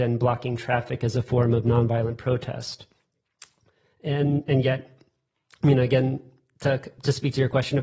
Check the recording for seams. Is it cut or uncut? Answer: uncut